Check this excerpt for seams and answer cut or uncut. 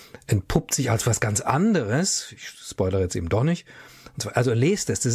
uncut